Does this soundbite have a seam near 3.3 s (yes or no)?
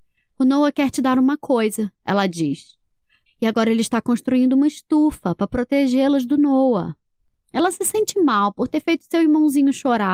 yes